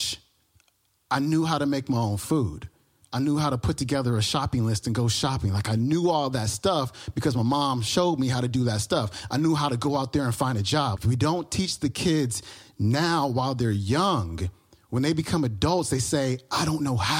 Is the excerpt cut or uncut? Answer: cut